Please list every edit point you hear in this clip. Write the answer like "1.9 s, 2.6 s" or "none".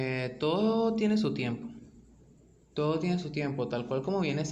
none